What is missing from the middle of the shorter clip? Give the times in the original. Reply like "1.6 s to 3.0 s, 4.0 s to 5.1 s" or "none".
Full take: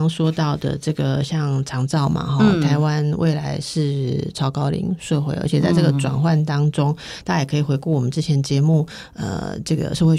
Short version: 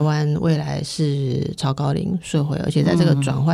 none